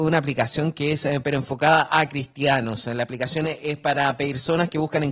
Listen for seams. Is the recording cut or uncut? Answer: cut